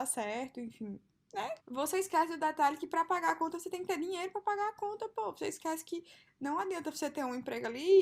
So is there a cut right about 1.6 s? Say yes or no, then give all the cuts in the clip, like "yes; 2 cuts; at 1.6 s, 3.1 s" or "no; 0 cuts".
yes; 1 cut; at 1.6 s